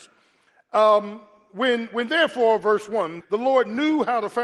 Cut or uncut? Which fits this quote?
cut